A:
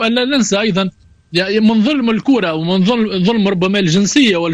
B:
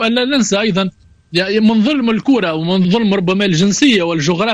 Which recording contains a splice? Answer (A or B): B